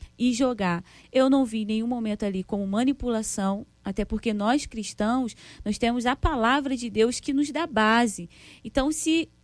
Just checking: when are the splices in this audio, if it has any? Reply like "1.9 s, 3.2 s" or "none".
1.0 s